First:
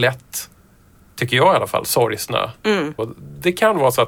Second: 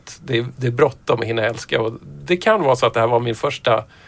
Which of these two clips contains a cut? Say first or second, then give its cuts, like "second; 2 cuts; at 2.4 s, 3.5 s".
first; 1 cut; at 3.0 s